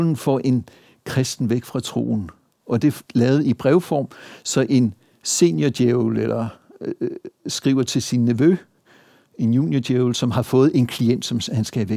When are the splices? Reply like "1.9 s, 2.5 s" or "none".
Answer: 3.1 s

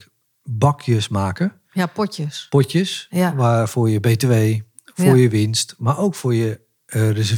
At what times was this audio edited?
none

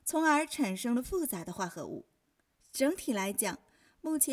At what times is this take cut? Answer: 2.5 s

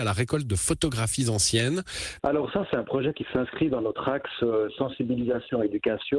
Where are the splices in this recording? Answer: 2.2 s

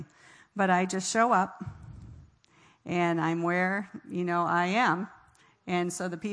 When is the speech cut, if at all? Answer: none

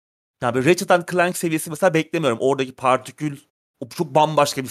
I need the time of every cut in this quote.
none

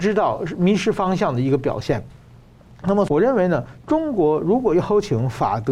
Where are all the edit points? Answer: 3.1 s

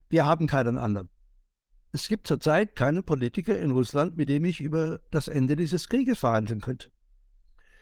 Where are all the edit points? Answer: none

